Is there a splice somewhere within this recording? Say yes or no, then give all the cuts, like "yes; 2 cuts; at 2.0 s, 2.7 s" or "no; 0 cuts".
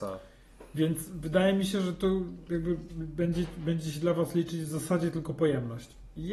no; 0 cuts